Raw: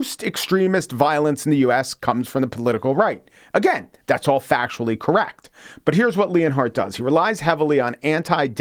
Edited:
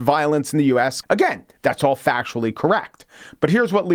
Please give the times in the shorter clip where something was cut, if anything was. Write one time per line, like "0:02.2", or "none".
0:01.0